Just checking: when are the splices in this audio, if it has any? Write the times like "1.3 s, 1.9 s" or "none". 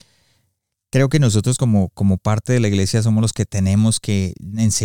none